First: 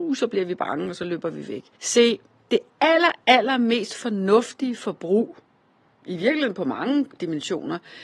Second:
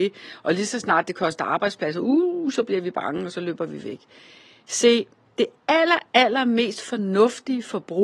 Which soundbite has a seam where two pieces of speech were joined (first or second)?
first